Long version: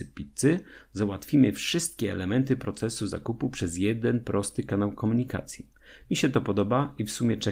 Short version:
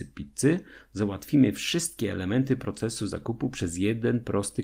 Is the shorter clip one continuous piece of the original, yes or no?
yes